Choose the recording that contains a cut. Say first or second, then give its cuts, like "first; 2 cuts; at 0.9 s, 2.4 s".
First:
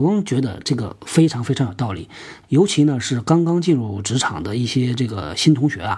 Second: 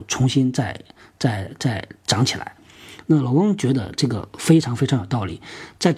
first; 1 cut; at 2.4 s